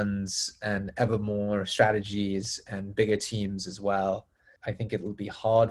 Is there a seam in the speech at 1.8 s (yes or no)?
no